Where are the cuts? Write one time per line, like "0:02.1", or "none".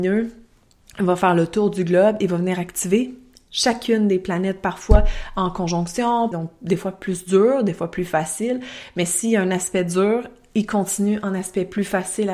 0:06.3